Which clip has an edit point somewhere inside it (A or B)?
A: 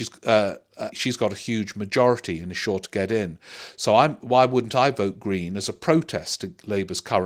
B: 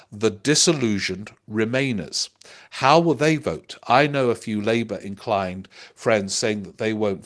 A